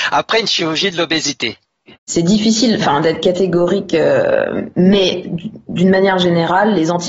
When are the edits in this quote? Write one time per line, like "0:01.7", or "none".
none